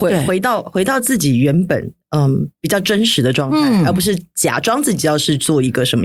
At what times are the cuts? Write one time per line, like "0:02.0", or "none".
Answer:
0:02.5